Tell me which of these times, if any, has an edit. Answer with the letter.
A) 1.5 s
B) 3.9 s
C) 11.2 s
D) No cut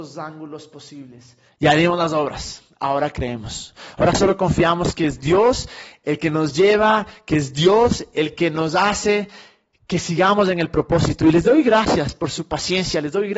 A